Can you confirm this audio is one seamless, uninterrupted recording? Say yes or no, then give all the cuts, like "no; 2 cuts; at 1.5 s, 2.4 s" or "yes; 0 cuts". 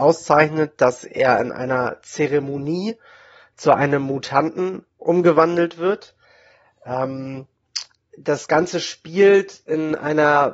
yes; 0 cuts